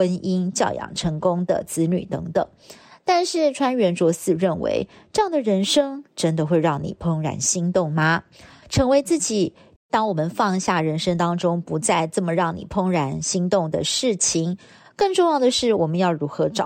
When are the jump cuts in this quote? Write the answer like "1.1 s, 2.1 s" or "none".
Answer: 9.8 s